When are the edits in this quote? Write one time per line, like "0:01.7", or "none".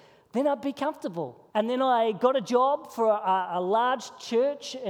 0:01.5